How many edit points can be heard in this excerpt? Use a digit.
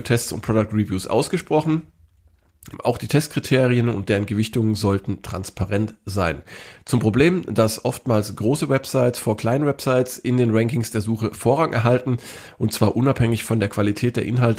1